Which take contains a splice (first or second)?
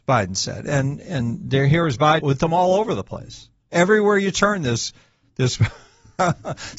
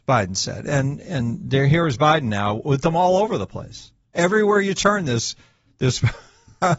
first